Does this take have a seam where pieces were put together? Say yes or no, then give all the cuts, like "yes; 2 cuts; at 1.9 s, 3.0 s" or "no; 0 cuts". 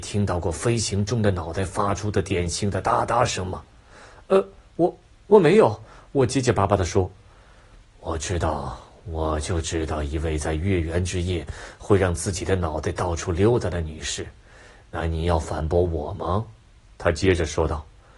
no; 0 cuts